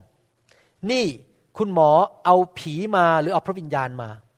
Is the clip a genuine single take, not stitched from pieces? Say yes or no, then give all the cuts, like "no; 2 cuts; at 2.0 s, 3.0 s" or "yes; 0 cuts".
yes; 0 cuts